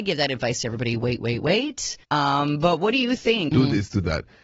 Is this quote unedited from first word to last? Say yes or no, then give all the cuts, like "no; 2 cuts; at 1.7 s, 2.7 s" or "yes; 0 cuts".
no; 2 cuts; at 2.0 s, 3.5 s